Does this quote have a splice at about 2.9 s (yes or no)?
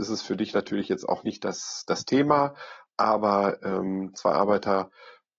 no